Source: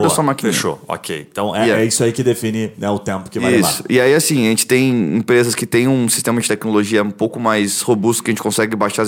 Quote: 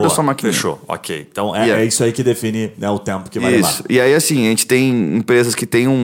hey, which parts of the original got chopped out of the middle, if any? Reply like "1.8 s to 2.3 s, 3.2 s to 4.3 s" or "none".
none

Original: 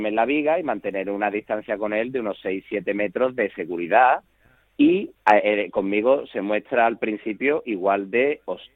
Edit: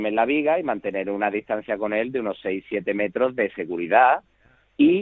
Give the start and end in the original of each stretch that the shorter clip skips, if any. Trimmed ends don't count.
none

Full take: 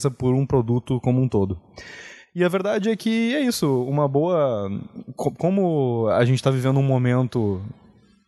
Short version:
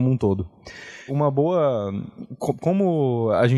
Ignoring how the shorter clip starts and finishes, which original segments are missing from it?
2.2 s to 3.8 s

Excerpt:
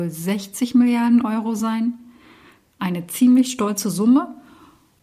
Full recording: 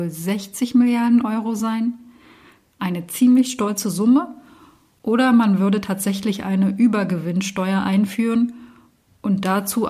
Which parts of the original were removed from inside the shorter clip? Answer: none

